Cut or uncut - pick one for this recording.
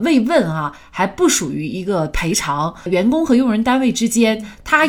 cut